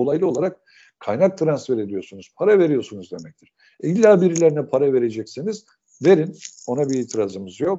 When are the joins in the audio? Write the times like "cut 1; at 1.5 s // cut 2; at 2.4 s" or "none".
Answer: none